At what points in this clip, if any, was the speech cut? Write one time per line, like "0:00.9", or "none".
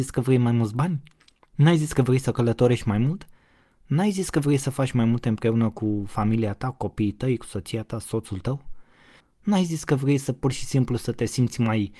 0:09.2